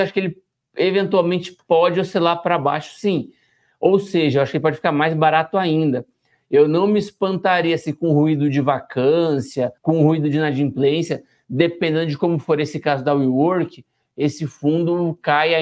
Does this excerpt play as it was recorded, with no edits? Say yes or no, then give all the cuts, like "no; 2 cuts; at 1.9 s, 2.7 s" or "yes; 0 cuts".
no; 1 cut; at 9.8 s